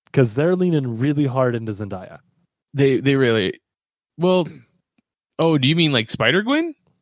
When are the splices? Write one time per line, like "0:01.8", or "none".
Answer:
none

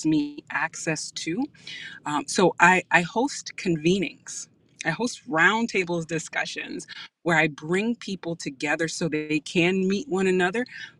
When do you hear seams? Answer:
none

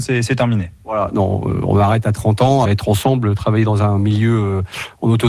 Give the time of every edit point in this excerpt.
0:02.6

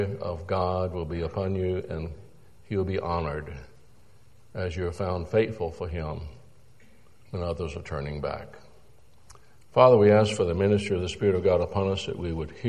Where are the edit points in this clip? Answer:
none

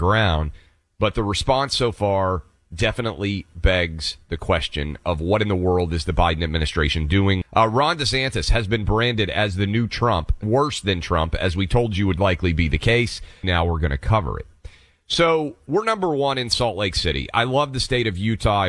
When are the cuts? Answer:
0:07.4
0:10.4
0:13.4

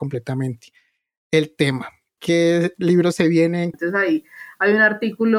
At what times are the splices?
0:02.2
0:03.7

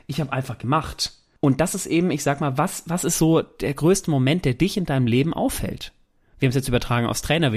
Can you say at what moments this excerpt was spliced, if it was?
none

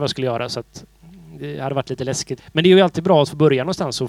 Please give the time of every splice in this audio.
0:02.4

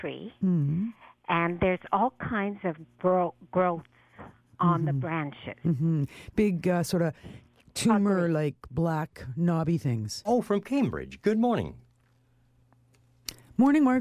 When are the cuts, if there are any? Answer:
0:10.2

